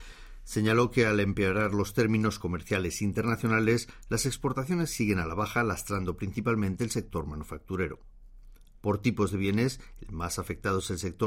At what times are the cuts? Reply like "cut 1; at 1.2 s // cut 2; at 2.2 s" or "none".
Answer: none